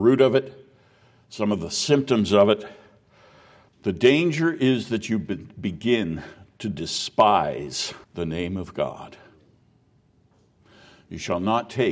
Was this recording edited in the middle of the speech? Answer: yes; 2 cuts; at 3.7 s, 8.0 s

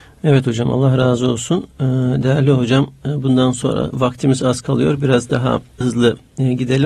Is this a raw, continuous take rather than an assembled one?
no; 1 cut; at 5.8 s

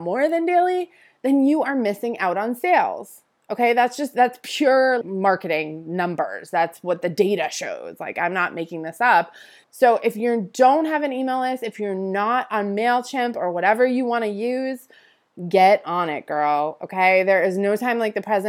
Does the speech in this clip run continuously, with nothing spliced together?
no; 2 cuts; at 5.0 s, 9.6 s

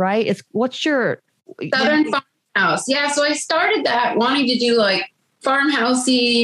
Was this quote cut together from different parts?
no; 0 cuts

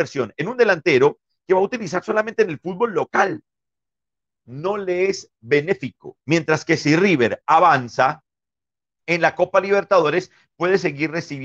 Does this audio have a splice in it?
yes; 1 cut; at 6.2 s

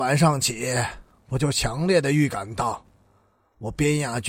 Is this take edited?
no; 0 cuts

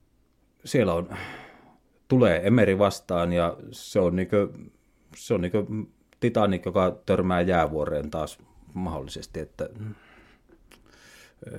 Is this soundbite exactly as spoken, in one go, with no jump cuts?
yes; 0 cuts

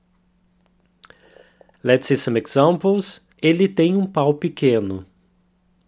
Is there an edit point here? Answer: yes; 1 cut; at 3.3 s

